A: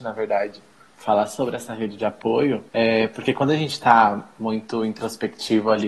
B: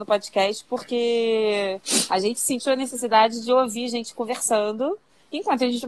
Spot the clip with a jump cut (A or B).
A